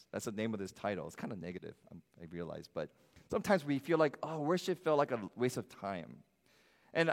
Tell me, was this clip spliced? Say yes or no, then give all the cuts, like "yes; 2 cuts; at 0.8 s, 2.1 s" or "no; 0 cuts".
no; 0 cuts